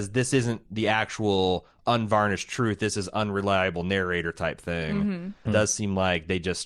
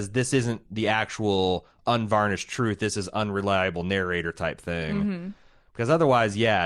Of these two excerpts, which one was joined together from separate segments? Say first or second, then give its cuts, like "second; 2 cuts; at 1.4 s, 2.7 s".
first; 1 cut; at 5.5 s